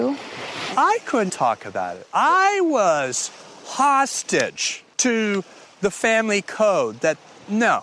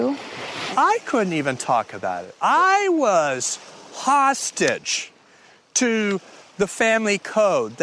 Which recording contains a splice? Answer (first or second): first